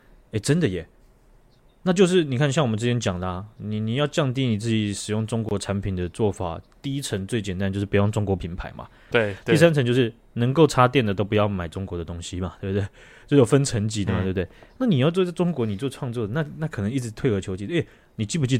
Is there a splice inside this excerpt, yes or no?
yes